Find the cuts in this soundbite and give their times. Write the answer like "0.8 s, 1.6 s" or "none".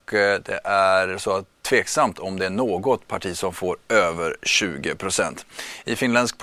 1.5 s